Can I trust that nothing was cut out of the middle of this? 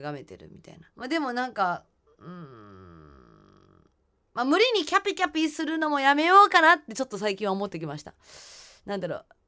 no; 1 cut; at 0.9 s

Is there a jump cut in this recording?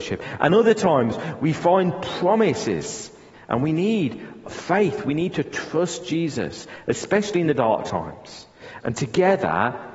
yes; 2 cuts; at 3.3 s, 8.8 s

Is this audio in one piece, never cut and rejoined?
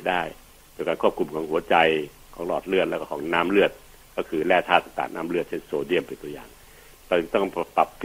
no; 1 cut; at 5.1 s

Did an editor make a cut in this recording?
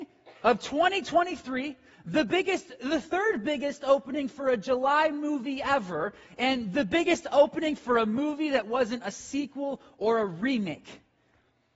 no; 0 cuts

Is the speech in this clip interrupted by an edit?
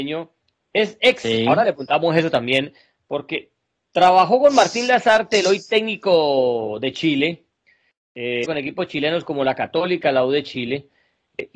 yes; 1 cut; at 8.4 s

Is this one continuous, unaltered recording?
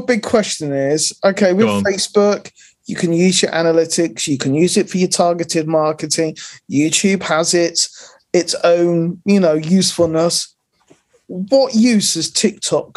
yes; 0 cuts

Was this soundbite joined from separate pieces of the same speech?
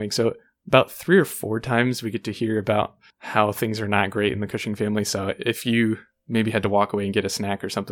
no; 0 cuts

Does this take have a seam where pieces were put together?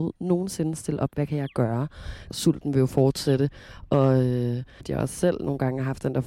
yes; 2 cuts; at 2.3 s, 4.8 s

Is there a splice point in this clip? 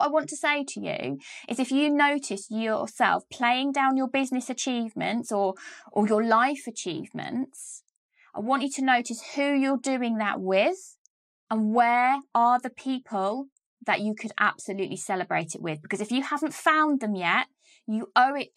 no; 0 cuts

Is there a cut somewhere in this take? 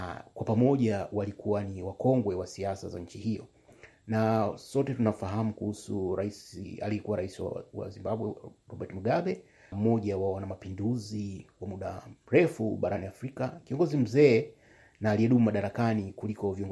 yes; 1 cut; at 9.7 s

